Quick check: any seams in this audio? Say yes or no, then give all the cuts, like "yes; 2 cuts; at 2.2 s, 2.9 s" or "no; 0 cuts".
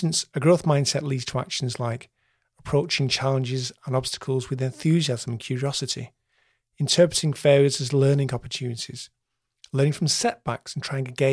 no; 0 cuts